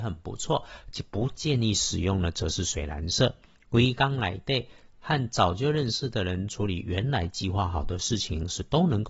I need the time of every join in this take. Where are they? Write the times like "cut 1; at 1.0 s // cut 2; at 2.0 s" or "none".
cut 1; at 3.5 s